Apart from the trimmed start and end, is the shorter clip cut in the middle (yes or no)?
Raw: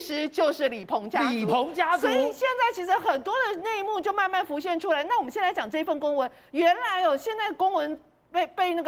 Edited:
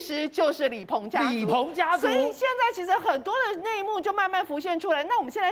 no